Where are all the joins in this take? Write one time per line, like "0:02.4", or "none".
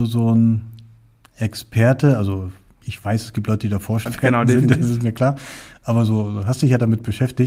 0:02.8
0:04.1

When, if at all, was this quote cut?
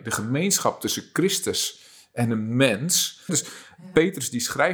0:03.3

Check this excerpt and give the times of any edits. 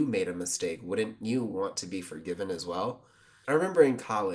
0:03.4

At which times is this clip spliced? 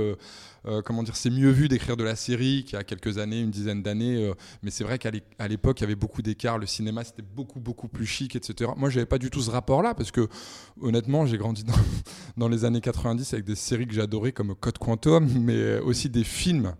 none

